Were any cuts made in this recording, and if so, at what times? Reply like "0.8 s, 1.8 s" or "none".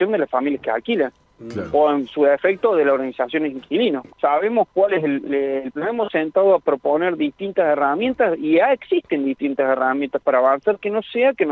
4.1 s, 5.7 s